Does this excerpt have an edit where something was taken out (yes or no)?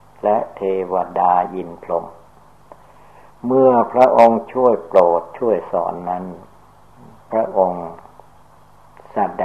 no